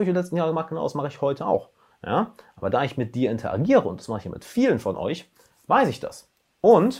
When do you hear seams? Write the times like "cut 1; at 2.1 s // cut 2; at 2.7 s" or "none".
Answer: cut 1; at 1.9 s